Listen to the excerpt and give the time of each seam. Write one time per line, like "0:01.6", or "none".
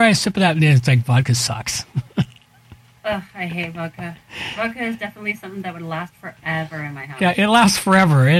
none

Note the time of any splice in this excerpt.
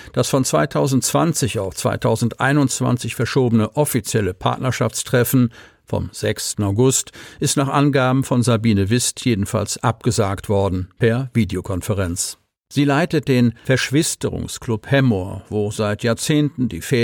0:06.5
0:12.6

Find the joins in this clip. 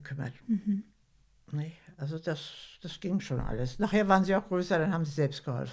none

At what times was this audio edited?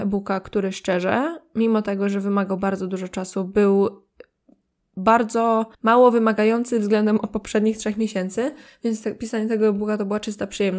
0:05.7

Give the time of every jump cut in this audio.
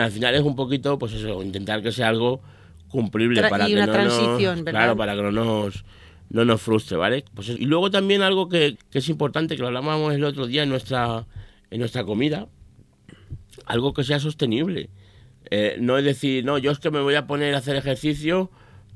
0:07.6
0:08.8

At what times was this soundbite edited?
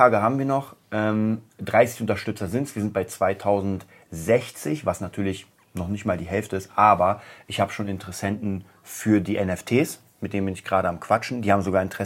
none

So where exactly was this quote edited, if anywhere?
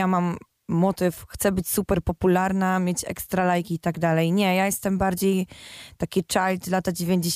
none

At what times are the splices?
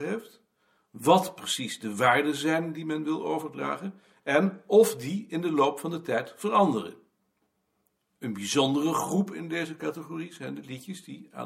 none

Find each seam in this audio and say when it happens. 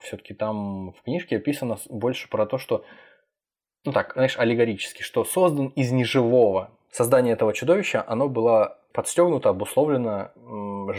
none

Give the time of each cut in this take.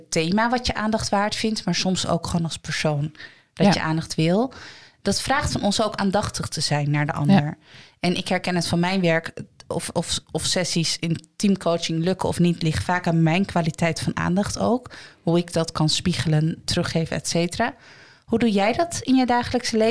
none

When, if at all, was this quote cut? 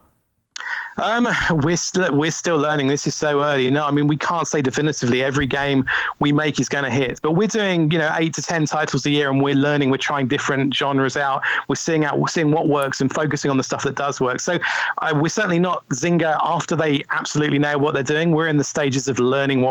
none

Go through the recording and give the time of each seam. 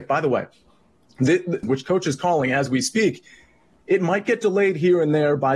0:01.6

